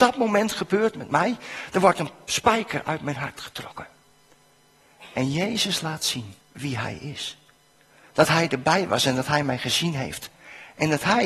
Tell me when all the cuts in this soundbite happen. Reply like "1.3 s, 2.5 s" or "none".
6.4 s